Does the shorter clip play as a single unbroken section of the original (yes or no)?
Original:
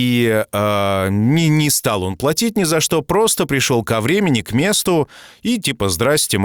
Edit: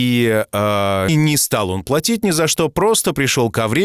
no